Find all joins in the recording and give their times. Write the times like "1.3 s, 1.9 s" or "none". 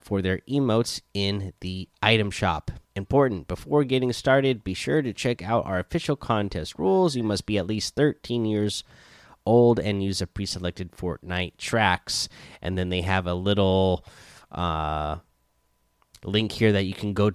2.9 s